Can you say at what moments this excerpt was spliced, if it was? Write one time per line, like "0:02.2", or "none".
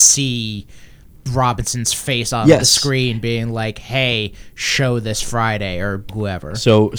0:06.1